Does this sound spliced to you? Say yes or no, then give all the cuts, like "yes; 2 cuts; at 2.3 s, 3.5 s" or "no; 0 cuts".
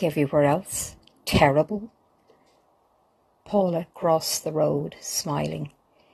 yes; 1 cut; at 3.4 s